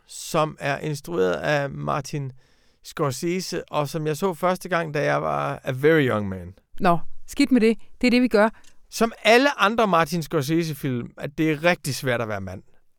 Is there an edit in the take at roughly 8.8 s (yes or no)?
yes